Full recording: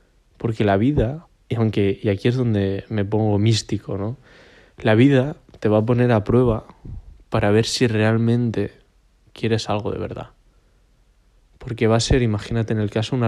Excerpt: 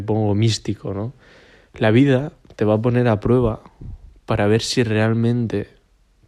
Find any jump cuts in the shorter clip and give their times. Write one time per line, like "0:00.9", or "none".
none